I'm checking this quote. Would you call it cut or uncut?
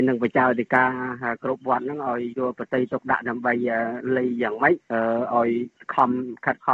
uncut